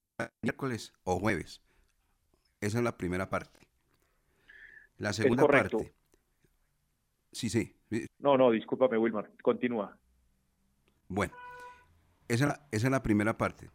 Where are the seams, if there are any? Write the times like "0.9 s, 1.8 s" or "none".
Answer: 8.1 s